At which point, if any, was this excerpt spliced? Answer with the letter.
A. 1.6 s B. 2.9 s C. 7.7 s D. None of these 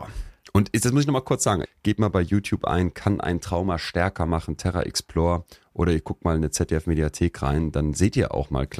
A